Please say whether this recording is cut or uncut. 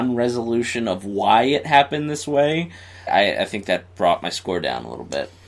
cut